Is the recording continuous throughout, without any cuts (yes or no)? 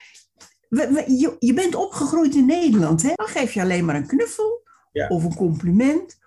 no